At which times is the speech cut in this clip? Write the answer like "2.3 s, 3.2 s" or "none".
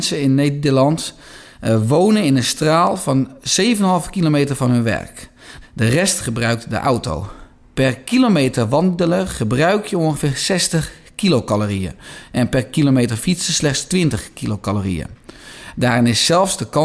5.6 s, 15.7 s